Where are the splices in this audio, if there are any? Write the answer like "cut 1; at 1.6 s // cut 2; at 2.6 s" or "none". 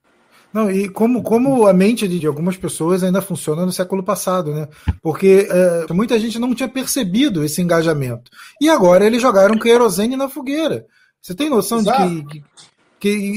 cut 1; at 2.2 s // cut 2; at 5.9 s